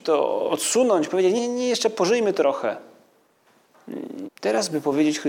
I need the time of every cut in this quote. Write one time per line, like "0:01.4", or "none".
0:01.4
0:04.2